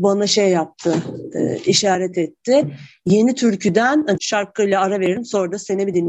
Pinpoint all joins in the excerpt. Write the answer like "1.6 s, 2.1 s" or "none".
4.2 s